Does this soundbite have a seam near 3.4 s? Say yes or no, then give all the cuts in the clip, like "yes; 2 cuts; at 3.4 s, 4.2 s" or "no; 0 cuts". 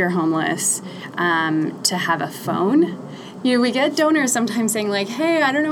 yes; 1 cut; at 3.4 s